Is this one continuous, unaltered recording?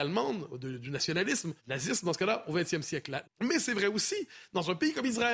no; 2 cuts; at 1.6 s, 3.2 s

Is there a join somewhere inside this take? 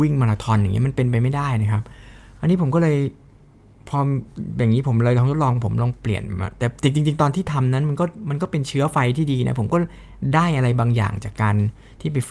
no; 0 cuts

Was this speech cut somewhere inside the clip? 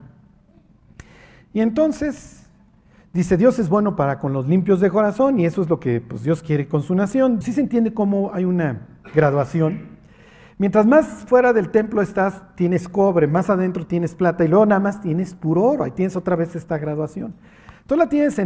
yes; 1 cut; at 7.4 s

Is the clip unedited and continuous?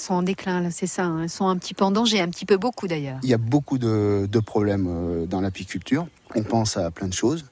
yes; 0 cuts

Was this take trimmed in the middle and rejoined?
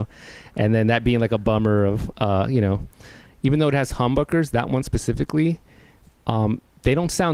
yes; 1 cut; at 3.3 s

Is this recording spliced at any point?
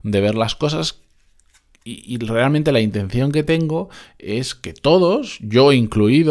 no; 0 cuts

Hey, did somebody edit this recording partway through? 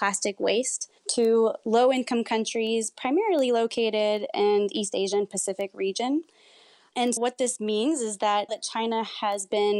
yes; 3 cuts; at 1.0 s, 7.2 s, 8.5 s

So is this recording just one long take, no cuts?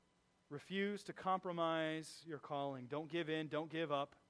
yes; 0 cuts

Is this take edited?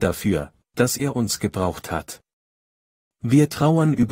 no; 0 cuts

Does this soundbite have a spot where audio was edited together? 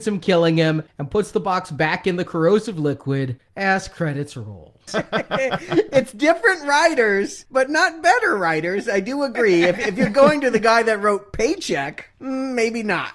yes; 1 cut; at 4.9 s

